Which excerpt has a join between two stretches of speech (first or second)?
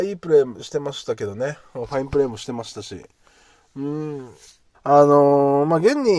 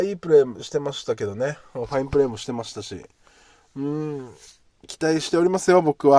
first